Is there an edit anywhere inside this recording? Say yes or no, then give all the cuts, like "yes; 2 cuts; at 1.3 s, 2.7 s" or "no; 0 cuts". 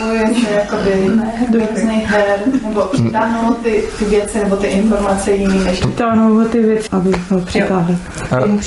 yes; 1 cut; at 6.9 s